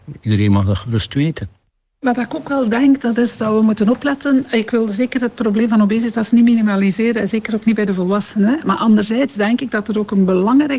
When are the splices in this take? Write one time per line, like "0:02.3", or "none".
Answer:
none